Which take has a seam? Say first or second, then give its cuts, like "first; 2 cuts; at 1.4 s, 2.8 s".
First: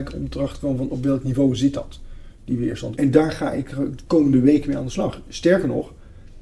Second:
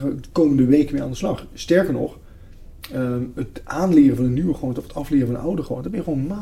first; 1 cut; at 2.9 s